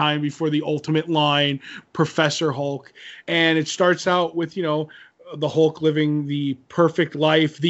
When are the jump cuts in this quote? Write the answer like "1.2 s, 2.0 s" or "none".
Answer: 1.8 s, 3.2 s